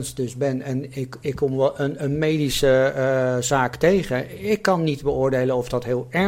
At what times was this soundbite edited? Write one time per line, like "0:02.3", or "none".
none